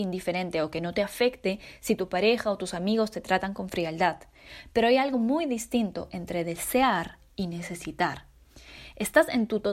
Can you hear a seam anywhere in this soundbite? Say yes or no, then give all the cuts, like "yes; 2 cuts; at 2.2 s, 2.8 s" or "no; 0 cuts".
no; 0 cuts